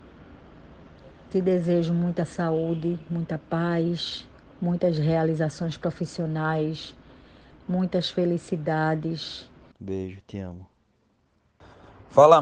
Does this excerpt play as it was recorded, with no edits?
no; 1 cut; at 9.7 s

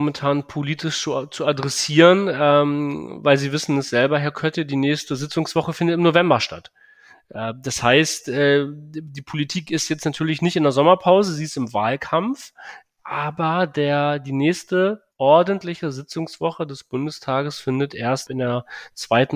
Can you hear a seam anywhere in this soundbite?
yes; 2 cuts; at 15.1 s, 18.3 s

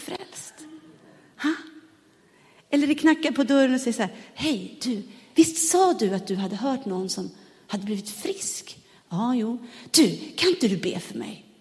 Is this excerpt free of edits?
no; 1 cut; at 5.3 s

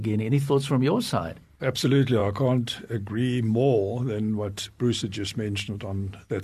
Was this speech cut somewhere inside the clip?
no; 0 cuts

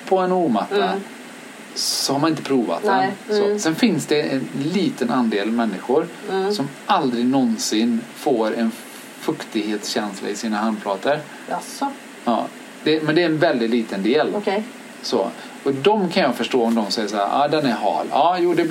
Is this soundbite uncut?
no; 1 cut; at 3.2 s

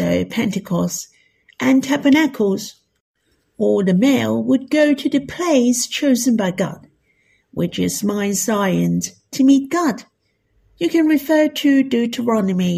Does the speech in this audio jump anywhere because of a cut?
no; 0 cuts

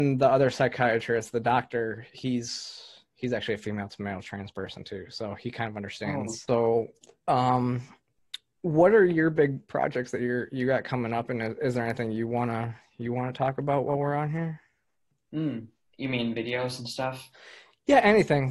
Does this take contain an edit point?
no; 0 cuts

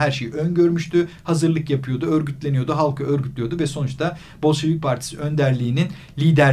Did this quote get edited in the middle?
no; 0 cuts

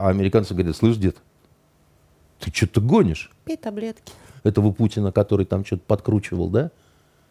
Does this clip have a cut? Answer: yes; 1 cut; at 4.4 s

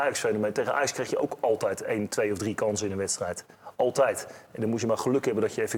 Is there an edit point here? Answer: no; 0 cuts

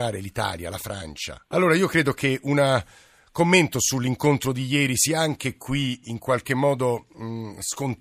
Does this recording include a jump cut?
yes; 1 cut; at 1.5 s

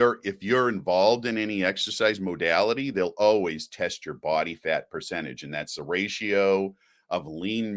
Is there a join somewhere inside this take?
no; 0 cuts

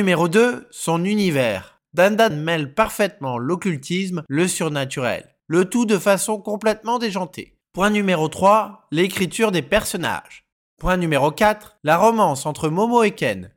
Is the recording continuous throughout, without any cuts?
no; 2 cuts; at 2.3 s, 4.3 s

